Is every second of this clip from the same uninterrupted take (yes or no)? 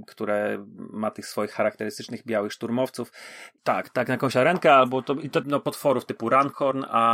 no